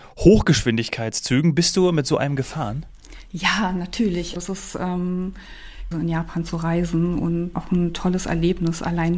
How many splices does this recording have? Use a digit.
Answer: 3